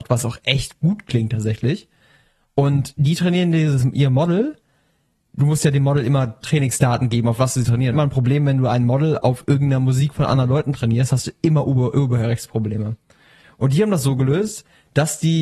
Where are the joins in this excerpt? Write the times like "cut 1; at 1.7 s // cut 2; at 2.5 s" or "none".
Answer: cut 1; at 7.9 s

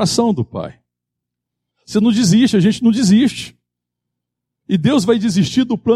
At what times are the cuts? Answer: cut 1; at 1.7 s

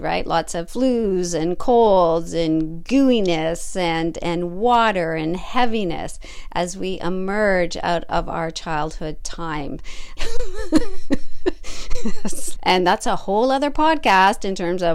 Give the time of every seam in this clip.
cut 1; at 10.2 s // cut 2; at 12.6 s

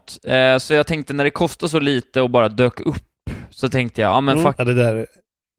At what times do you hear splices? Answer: cut 1; at 4.5 s

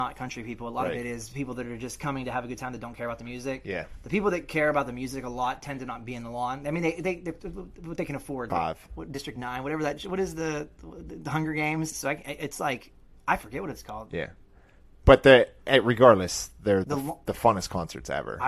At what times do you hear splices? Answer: cut 1; at 8.5 s // cut 2; at 11.9 s // cut 3; at 16.8 s

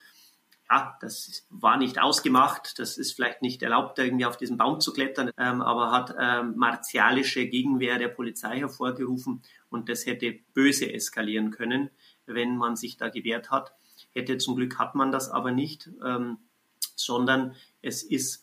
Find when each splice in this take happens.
cut 1; at 5.3 s

